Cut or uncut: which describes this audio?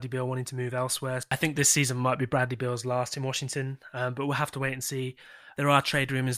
uncut